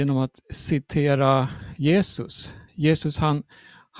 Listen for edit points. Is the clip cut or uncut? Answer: uncut